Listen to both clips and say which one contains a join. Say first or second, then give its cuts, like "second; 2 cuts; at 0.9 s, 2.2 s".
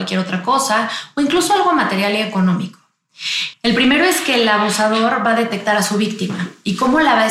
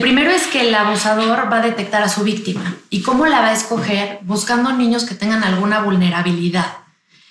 first; 1 cut; at 3.5 s